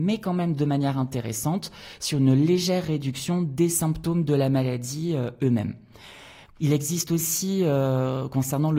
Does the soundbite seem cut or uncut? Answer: cut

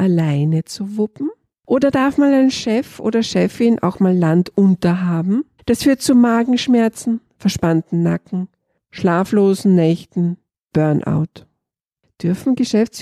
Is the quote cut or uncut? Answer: cut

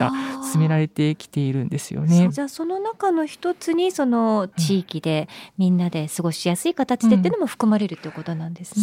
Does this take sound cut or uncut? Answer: cut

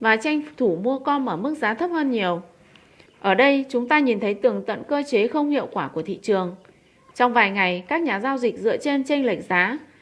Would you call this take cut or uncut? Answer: cut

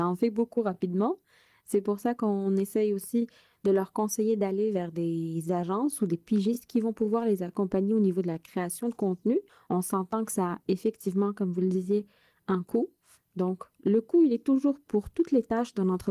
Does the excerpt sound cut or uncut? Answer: uncut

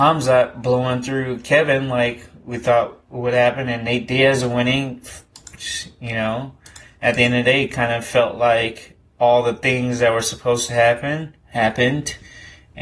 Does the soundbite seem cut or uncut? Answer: uncut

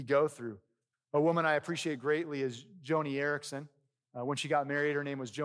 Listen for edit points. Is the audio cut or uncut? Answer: cut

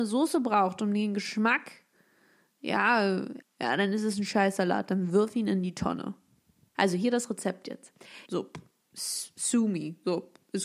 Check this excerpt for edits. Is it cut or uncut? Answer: cut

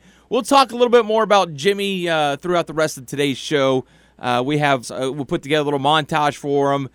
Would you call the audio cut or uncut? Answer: cut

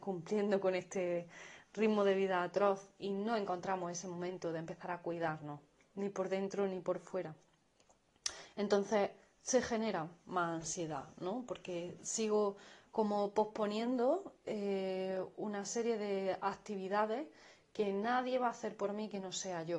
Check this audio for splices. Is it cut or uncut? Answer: uncut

